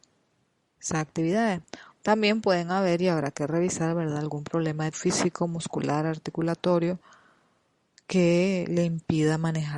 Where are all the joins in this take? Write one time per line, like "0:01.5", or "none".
0:01.9
0:04.9